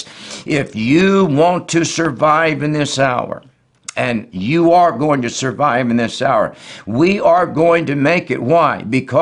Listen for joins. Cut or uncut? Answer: uncut